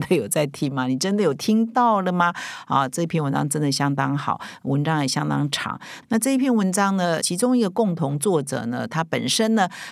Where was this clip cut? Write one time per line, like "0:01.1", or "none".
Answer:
0:07.2